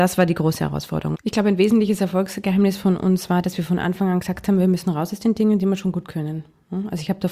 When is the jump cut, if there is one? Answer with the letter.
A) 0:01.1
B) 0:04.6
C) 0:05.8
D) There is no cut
A